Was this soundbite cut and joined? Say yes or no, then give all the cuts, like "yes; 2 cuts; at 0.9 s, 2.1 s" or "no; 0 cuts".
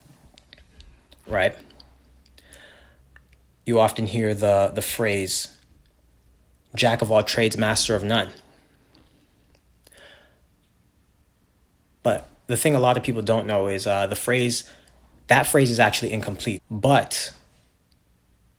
yes; 1 cut; at 16.6 s